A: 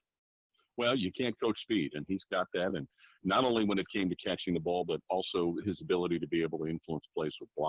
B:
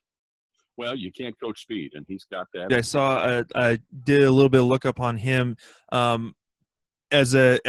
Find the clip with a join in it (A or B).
B